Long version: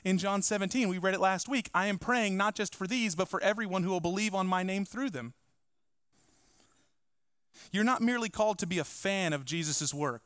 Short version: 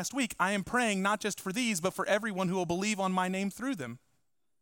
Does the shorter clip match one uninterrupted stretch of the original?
yes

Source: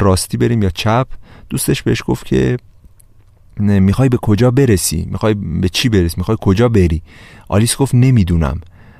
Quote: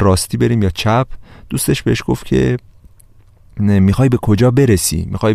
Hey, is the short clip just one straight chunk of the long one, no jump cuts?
yes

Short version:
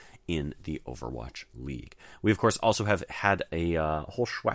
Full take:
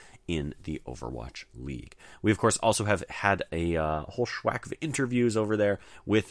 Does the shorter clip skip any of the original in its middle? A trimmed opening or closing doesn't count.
no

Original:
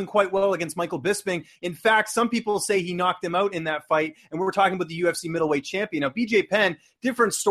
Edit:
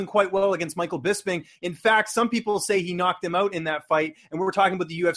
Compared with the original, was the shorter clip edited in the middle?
no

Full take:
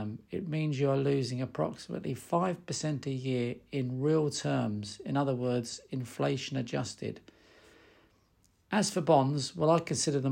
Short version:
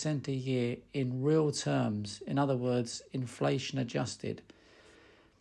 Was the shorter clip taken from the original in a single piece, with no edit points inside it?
yes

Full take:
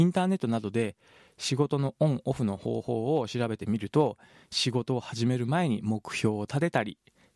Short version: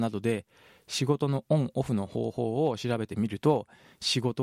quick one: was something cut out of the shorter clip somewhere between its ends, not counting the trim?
no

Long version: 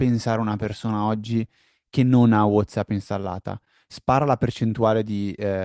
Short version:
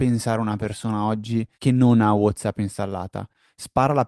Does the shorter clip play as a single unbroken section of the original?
no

